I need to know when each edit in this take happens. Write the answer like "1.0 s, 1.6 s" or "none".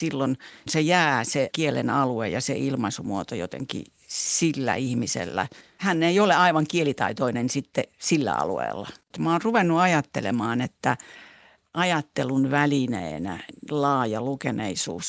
none